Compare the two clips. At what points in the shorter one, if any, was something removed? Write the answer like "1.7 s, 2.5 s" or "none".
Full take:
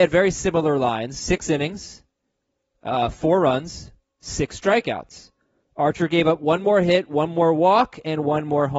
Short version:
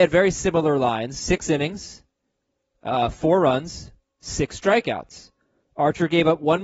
none

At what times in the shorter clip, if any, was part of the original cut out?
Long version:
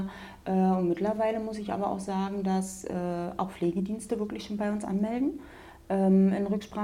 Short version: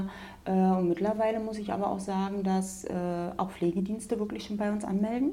none

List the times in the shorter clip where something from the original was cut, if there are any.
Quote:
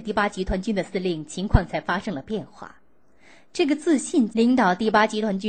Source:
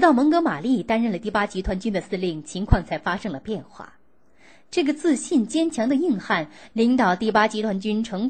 4.3 s

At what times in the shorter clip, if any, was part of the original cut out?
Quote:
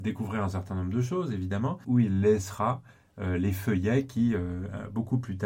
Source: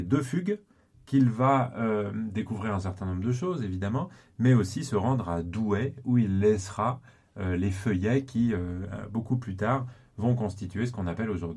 1.8 s

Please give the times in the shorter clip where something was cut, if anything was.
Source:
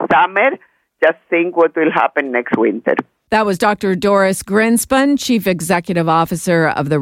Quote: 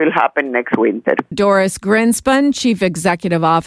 1.3 s

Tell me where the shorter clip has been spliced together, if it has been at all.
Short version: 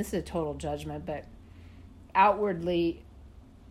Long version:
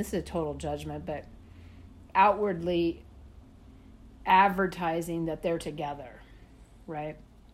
none

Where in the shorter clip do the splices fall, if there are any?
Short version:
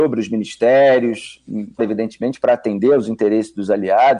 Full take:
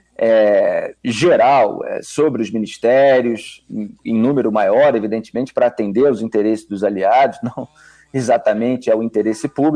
1.8 s

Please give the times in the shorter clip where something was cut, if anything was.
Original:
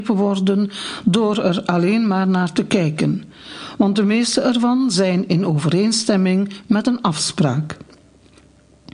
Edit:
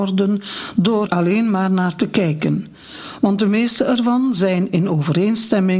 1.1 s

